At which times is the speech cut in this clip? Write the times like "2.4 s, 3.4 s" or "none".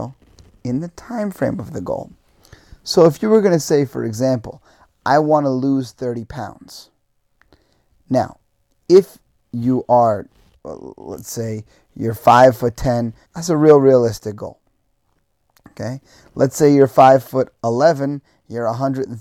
10.6 s, 13.3 s